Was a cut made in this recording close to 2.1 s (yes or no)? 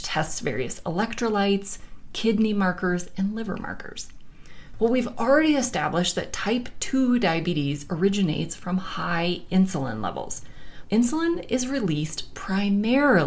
no